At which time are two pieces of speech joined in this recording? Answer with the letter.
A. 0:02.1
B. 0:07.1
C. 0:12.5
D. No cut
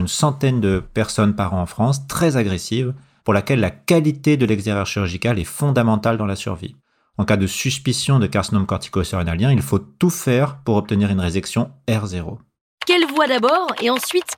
D